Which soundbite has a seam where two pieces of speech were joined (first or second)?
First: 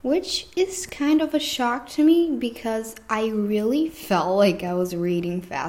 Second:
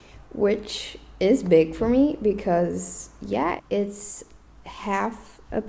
second